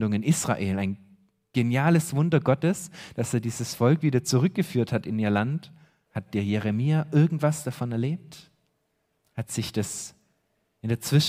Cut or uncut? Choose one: cut